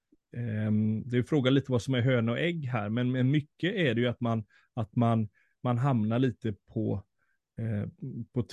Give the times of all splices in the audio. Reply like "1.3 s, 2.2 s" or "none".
none